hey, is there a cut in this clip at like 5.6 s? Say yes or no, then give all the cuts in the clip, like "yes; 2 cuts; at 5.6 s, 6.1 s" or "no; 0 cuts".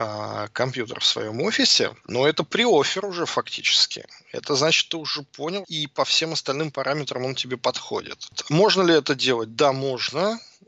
yes; 1 cut; at 5.6 s